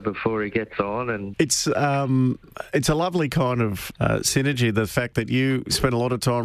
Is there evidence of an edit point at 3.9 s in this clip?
yes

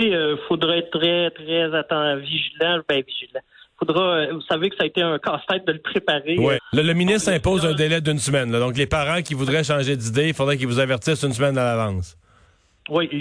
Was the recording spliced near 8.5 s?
no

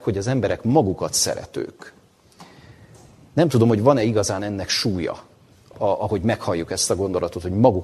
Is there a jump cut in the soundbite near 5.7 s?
yes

